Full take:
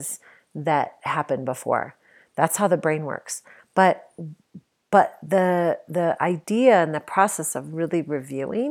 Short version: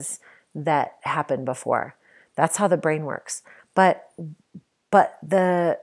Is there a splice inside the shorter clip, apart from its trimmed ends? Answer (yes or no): no